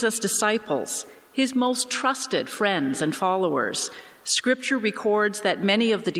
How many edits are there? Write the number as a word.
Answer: zero